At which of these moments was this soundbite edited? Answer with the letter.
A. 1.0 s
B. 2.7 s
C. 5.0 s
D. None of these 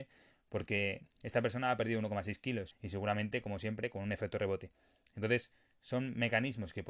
B